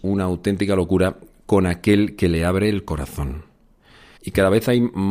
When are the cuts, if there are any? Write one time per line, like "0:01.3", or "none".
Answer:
0:04.2

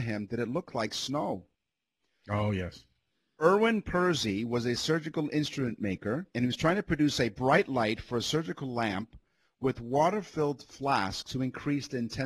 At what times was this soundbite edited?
0:02.2
0:06.3

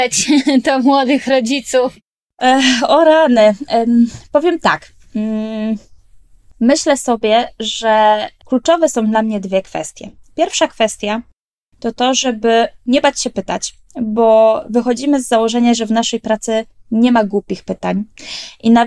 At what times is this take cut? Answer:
none

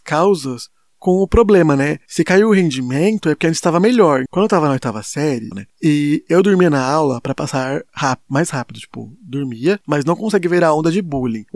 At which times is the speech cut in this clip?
0:04.3
0:05.5
0:09.8

